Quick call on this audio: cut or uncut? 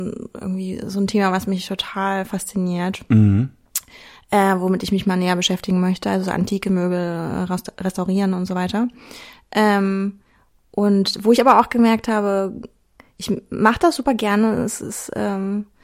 uncut